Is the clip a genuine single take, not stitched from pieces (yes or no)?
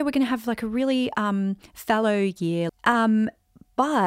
no